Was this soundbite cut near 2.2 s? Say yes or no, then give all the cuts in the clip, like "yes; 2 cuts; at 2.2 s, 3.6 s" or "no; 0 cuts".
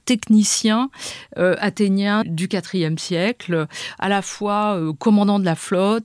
yes; 1 cut; at 2.2 s